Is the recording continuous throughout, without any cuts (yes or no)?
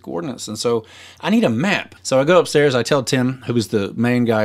no